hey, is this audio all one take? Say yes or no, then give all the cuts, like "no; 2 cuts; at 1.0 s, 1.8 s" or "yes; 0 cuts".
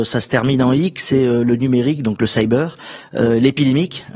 yes; 0 cuts